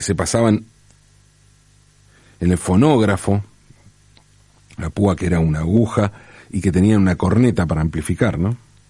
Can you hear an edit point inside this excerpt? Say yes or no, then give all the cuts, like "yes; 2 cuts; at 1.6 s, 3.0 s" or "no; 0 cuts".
no; 0 cuts